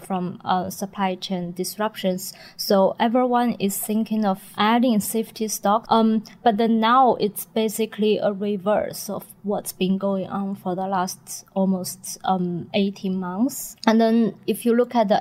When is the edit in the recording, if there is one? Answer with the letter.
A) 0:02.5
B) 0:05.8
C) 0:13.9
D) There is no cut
B